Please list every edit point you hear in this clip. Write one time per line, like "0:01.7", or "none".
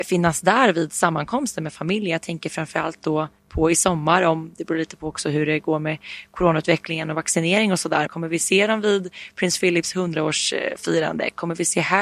0:08.1